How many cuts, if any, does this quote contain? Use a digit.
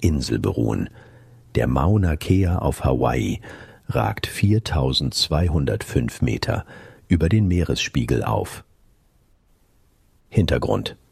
1